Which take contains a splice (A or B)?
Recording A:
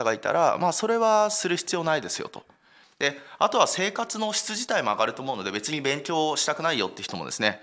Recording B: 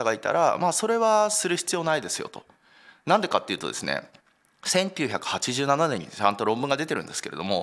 A